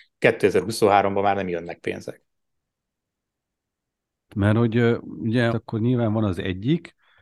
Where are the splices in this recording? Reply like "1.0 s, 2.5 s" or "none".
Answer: 4.3 s, 5.5 s